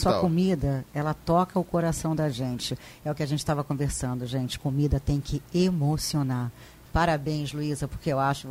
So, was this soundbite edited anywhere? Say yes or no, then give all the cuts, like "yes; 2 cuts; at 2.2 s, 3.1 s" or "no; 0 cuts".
yes; 1 cut; at 6.9 s